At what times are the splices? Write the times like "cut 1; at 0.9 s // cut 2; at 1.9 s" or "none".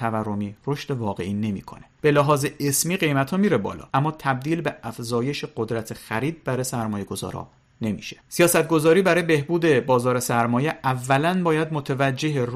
cut 1; at 8.2 s